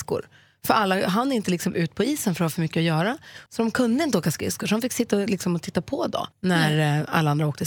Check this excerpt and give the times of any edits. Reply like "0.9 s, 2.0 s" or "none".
3.5 s, 6.3 s